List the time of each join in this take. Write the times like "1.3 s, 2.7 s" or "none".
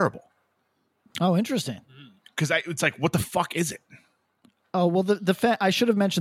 none